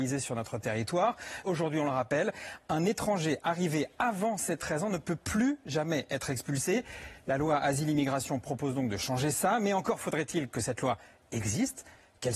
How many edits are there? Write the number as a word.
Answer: one